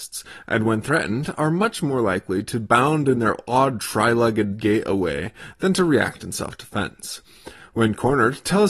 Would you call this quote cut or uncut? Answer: uncut